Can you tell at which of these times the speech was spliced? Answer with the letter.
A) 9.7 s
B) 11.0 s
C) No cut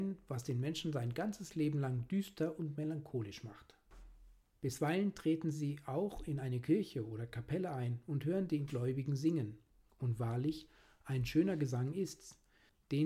C